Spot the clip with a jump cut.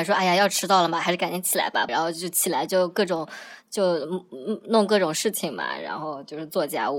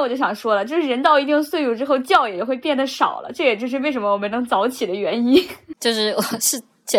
first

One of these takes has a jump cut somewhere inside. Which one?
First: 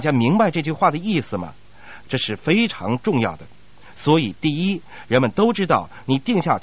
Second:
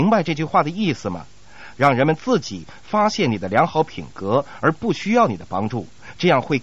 first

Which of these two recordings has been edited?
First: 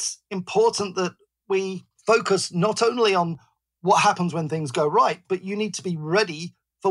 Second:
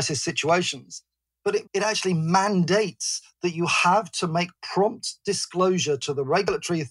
second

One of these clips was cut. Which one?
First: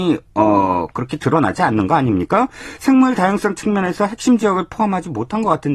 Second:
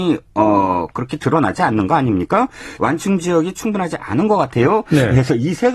second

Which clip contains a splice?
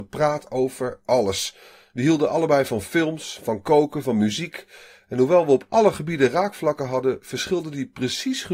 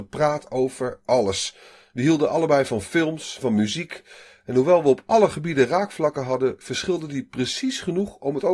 second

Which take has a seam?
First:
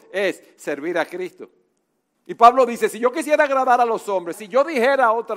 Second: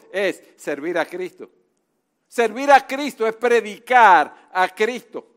first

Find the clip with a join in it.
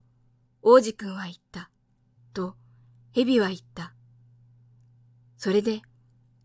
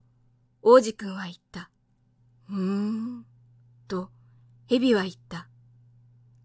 first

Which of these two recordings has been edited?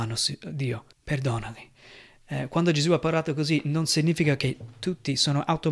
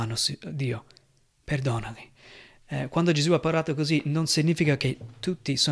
first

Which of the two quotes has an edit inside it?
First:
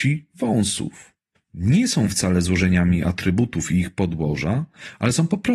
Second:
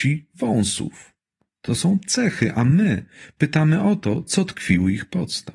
first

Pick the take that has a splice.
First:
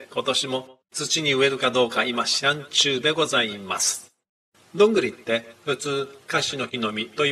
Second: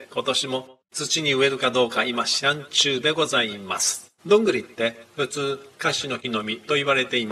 second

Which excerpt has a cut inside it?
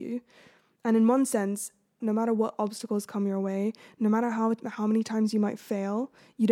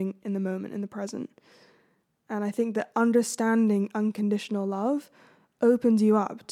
first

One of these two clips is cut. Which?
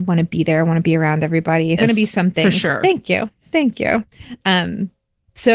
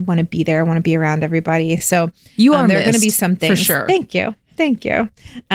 first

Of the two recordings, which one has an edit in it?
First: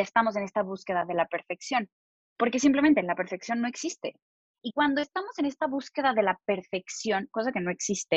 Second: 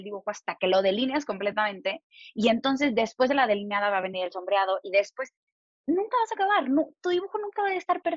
first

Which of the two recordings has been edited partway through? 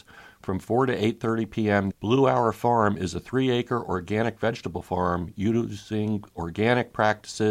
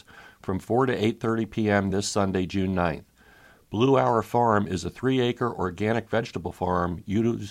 first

